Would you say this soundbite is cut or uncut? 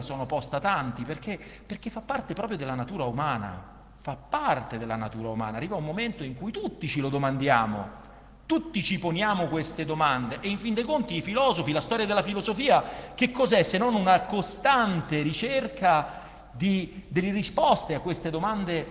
uncut